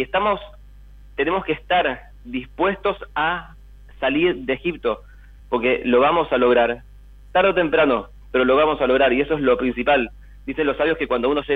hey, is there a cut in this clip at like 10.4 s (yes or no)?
no